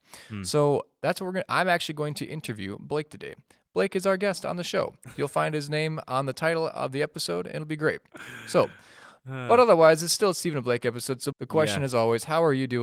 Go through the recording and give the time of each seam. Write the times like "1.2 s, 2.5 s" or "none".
11.3 s